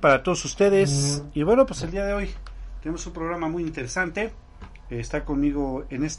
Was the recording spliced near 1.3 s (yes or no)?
no